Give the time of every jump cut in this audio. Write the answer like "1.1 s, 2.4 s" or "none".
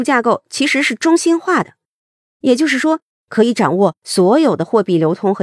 3.1 s